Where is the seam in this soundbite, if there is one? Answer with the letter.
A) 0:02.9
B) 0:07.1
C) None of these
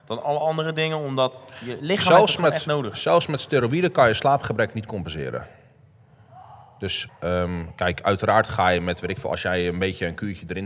B